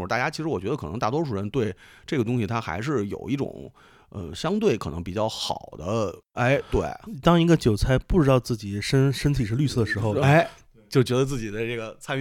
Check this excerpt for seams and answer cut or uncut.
cut